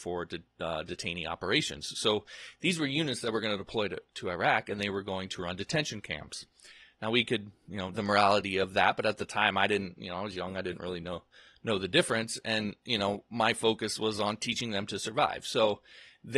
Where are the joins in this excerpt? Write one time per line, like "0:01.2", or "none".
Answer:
0:07.9